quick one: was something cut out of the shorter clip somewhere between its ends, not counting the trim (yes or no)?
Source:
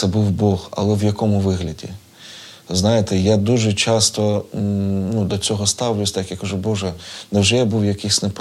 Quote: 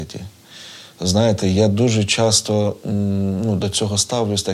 no